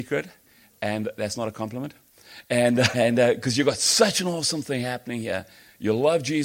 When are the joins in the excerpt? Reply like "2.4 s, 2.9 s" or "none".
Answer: 2.9 s